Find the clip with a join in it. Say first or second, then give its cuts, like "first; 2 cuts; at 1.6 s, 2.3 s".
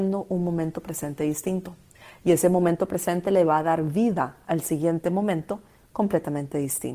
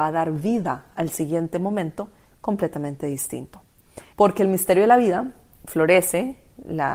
second; 1 cut; at 4.1 s